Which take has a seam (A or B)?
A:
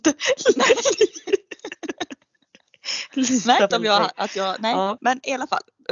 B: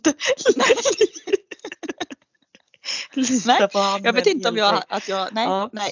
A